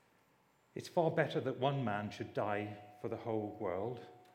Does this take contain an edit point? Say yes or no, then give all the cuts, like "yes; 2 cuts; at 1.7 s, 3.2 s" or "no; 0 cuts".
no; 0 cuts